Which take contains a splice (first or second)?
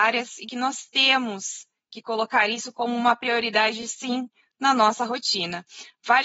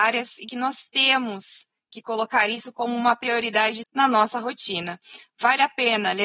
second